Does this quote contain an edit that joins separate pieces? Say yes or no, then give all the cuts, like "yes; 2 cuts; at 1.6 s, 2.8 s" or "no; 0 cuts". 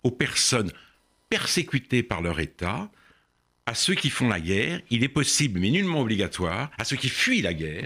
no; 0 cuts